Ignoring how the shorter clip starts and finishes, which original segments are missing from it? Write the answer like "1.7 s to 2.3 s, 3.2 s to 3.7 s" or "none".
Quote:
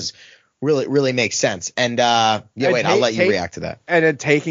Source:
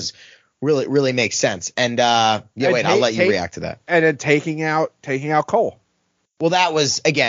none

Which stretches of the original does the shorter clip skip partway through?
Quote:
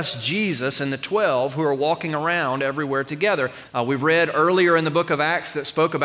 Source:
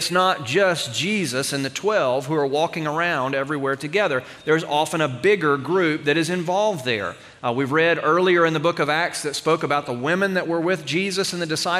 4.4 s to 7.4 s

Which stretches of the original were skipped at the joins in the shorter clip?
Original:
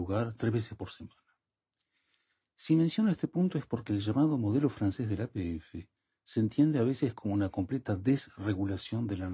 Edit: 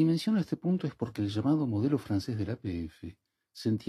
none

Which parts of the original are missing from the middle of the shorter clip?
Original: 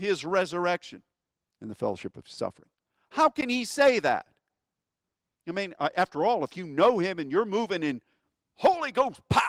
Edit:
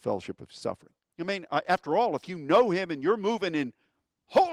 2.9 s to 5.4 s

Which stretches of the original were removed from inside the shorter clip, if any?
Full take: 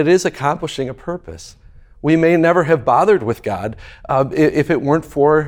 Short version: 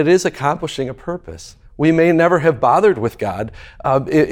1.7 s to 1.9 s

